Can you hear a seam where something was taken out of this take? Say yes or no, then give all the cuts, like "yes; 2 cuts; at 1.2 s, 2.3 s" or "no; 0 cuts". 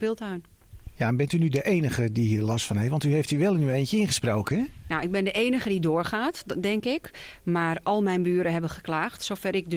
no; 0 cuts